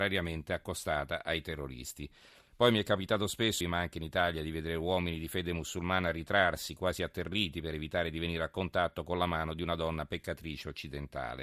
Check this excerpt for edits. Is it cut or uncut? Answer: cut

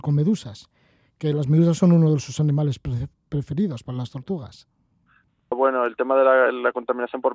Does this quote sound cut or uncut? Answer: cut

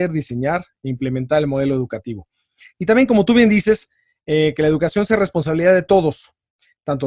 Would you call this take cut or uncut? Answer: uncut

